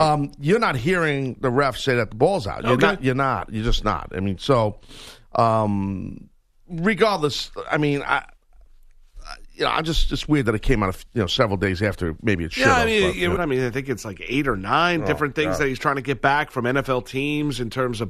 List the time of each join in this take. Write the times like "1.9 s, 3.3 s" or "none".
13.4 s